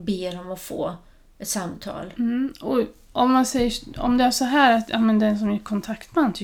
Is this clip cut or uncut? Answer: uncut